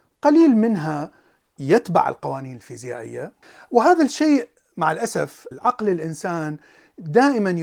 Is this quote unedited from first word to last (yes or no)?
yes